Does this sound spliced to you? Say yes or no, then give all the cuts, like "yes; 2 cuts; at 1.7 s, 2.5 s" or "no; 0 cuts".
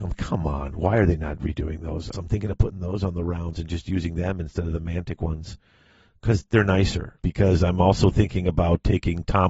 yes; 2 cuts; at 2.1 s, 7.2 s